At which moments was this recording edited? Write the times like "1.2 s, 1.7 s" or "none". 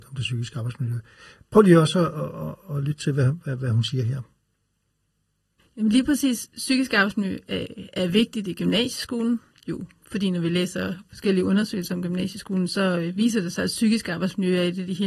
none